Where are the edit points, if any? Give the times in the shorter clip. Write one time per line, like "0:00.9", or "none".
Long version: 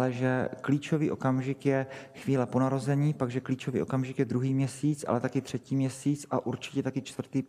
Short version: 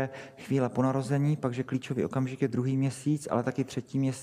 none